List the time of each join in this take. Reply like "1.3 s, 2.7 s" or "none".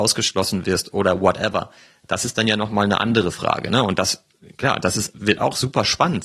none